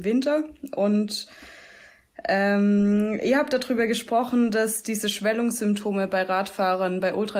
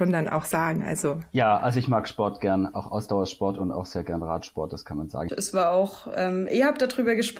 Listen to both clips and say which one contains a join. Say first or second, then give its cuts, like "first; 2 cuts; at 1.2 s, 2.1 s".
second; 2 cuts; at 5.3 s, 6.5 s